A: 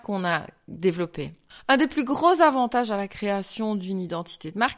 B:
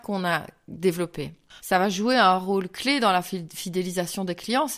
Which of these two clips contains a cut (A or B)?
B